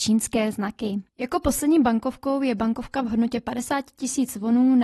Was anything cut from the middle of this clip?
yes; 1 cut; at 1.1 s

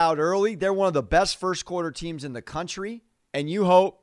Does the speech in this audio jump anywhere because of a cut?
no; 0 cuts

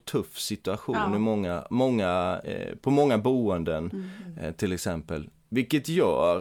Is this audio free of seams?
yes; 0 cuts

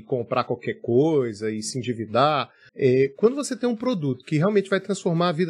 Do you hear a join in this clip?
yes; 1 cut; at 2.7 s

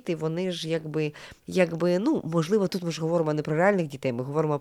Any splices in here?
yes; 2 cuts; at 1.4 s, 2.7 s

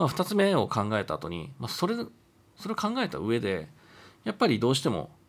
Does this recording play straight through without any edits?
yes; 0 cuts

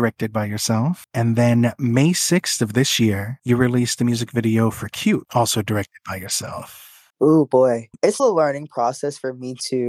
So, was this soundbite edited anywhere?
yes; 2 cuts; at 7.1 s, 8.2 s

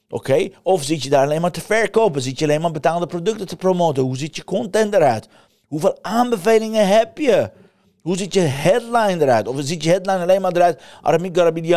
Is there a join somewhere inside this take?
no; 0 cuts

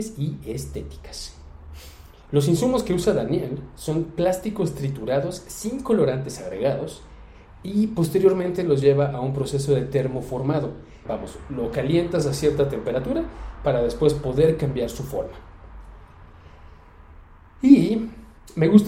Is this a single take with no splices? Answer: no; 1 cut; at 11.0 s

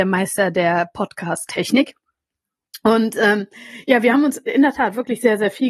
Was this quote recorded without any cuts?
yes; 0 cuts

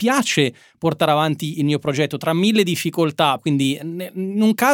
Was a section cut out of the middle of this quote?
yes; 1 cut; at 3.4 s

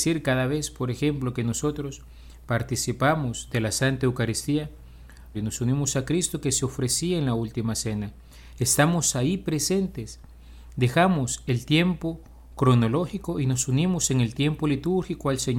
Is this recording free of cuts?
no; 1 cut; at 5.3 s

